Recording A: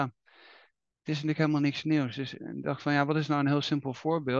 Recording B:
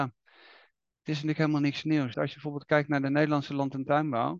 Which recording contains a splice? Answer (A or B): B